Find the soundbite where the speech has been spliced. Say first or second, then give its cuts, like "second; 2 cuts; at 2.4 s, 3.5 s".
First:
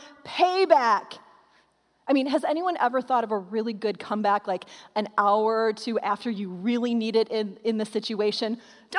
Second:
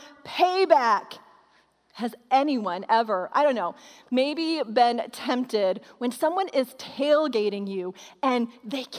second; 1 cut; at 1.9 s